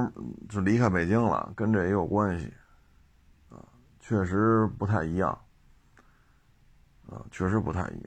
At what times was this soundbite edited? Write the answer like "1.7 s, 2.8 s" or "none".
none